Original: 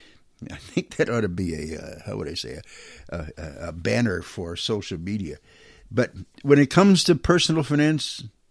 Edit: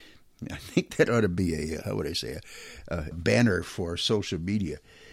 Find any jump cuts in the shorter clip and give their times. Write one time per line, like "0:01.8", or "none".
0:01.8
0:03.1